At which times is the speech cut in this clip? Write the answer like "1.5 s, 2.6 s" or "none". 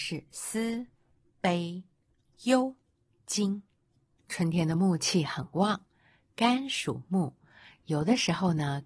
2.2 s